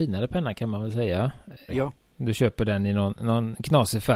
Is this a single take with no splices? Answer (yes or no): no